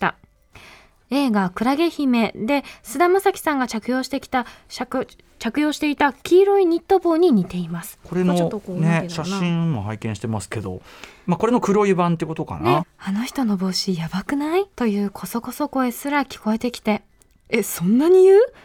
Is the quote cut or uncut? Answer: cut